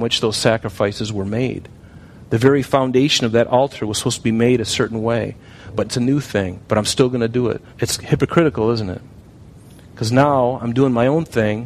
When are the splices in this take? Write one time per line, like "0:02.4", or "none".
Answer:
0:05.8
0:07.7